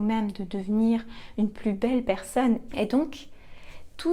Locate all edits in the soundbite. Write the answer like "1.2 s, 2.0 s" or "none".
2.7 s